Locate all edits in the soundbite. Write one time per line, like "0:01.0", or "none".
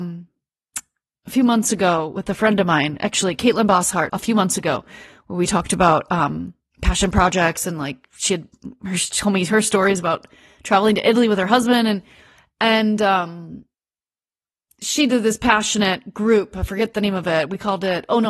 0:04.1

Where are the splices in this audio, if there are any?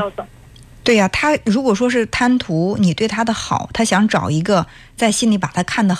none

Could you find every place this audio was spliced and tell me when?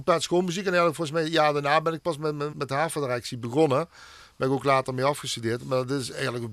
0:02.5

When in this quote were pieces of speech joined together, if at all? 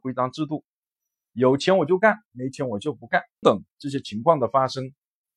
0:03.4

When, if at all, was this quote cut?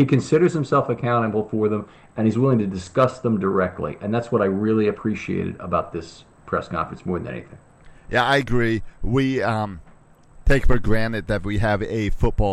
none

